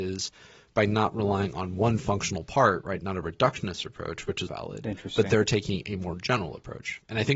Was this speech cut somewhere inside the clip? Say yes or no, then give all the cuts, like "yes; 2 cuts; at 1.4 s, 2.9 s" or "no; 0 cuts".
yes; 1 cut; at 4.5 s